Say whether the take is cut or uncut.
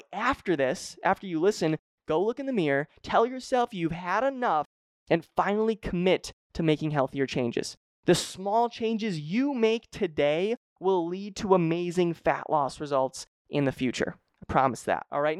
uncut